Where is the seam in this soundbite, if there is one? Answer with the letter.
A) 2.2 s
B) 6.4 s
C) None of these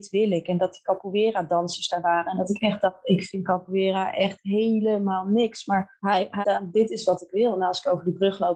B